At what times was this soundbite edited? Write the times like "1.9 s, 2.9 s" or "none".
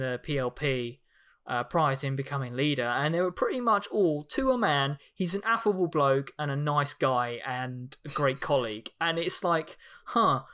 none